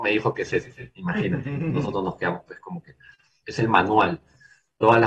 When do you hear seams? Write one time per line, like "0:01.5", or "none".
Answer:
0:03.4